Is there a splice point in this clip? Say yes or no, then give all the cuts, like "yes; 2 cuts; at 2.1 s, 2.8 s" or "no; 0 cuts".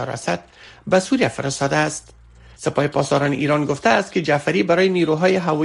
yes; 1 cut; at 2.5 s